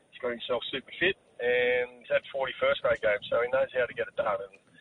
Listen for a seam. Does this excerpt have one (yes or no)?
yes